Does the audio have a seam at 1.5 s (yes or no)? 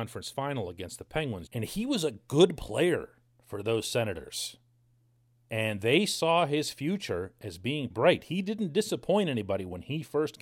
yes